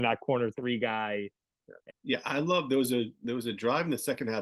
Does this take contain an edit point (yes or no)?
yes